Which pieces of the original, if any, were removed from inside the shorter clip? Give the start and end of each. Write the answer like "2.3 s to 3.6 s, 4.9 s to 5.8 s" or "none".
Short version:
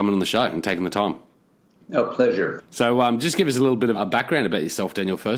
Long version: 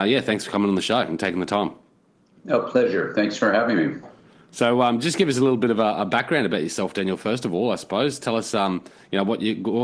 3.1 s to 4.4 s, 5.7 s to 5.9 s